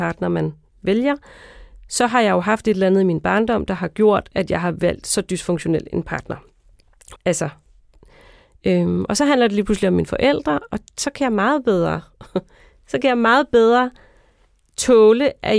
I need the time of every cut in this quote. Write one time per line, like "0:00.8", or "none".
0:07.2